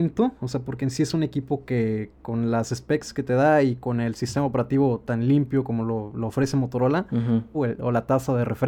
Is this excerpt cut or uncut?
cut